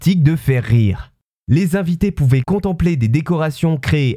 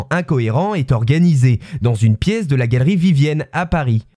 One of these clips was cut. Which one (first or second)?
first